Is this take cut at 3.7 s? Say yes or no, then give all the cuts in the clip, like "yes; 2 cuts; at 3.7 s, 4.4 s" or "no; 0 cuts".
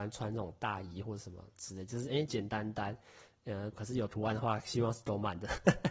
yes; 2 cuts; at 2.3 s, 3.7 s